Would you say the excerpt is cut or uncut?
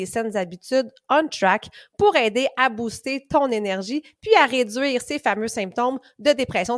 uncut